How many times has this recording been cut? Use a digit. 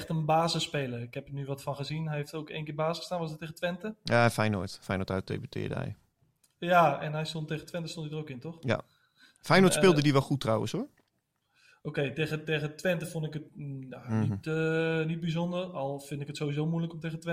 0